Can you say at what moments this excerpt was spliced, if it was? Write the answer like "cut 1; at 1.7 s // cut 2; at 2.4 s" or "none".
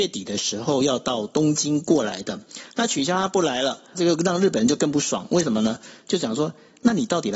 cut 1; at 2.7 s // cut 2; at 3.9 s